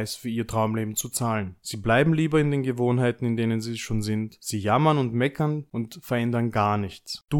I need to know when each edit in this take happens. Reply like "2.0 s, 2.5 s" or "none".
none